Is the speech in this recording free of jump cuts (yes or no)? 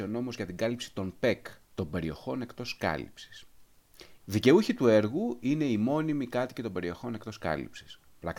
no